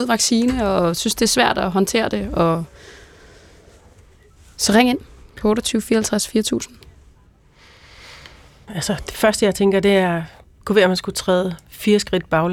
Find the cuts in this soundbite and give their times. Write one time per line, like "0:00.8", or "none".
0:08.7